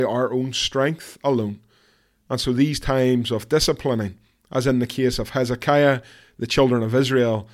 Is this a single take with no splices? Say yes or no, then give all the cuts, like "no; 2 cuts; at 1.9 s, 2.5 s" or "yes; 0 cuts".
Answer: yes; 0 cuts